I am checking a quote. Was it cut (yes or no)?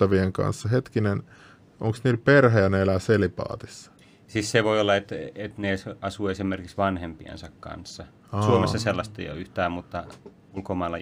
no